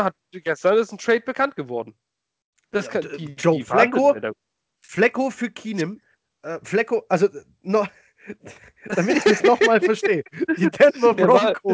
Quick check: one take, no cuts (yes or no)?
yes